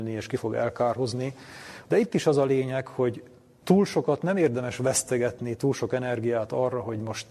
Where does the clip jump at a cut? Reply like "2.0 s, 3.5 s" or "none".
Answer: 1.8 s